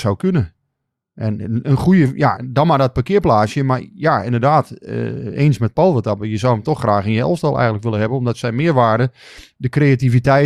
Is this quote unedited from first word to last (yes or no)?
no